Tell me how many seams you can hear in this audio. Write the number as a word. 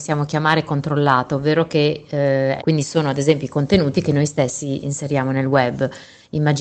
one